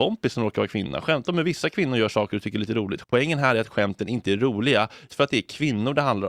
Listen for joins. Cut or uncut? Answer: cut